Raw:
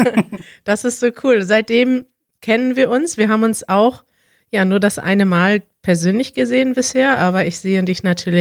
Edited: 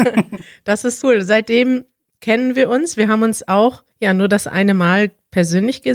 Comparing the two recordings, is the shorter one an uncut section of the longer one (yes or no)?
no